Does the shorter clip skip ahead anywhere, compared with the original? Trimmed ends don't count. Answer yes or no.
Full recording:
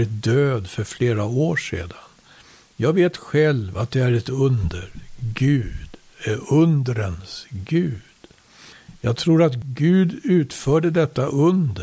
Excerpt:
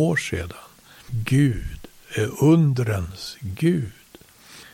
yes